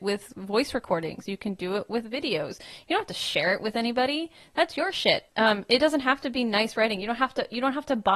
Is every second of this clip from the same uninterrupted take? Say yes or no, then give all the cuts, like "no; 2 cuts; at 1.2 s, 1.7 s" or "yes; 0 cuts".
no; 1 cut; at 5.3 s